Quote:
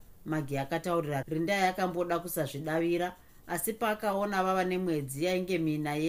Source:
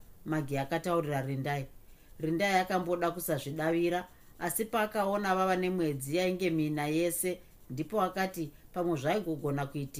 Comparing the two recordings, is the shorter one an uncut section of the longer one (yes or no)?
no